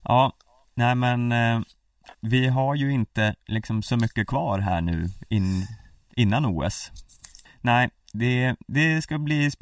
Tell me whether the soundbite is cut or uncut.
cut